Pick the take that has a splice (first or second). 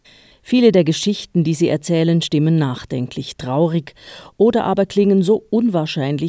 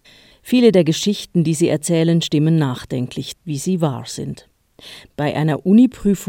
second